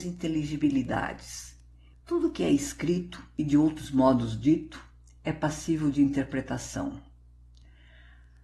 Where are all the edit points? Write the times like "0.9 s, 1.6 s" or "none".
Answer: 1.9 s